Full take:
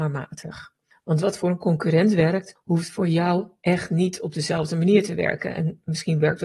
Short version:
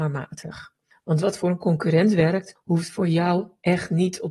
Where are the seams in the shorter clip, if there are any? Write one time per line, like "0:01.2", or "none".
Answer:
none